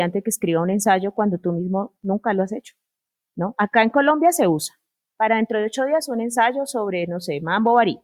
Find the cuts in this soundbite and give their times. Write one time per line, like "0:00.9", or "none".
none